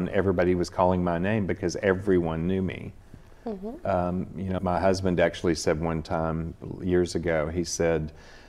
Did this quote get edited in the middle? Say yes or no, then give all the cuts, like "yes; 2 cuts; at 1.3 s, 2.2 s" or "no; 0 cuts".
yes; 1 cut; at 4.6 s